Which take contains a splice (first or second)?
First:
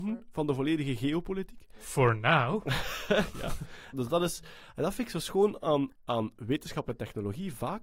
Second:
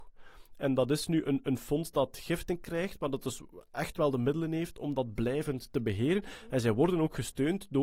first